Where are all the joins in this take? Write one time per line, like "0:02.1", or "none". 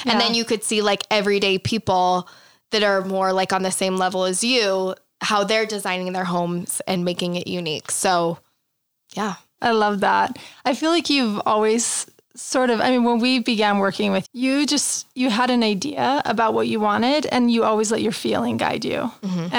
0:09.6
0:14.2